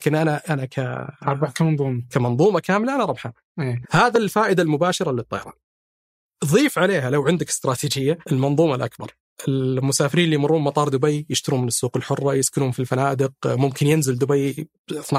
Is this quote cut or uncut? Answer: cut